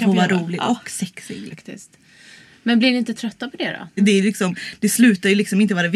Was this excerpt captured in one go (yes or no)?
no